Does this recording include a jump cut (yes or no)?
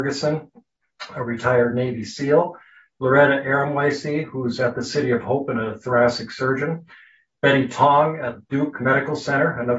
no